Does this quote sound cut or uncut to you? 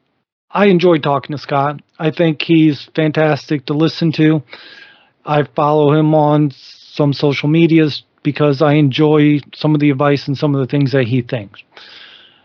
uncut